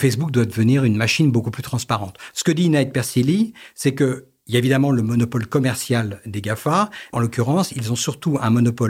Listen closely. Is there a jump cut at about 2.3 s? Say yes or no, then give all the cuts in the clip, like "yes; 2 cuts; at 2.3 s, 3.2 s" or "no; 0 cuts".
no; 1 cut; at 7.1 s